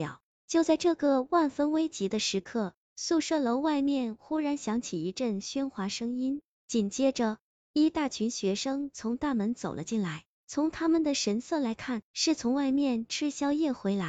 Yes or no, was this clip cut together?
yes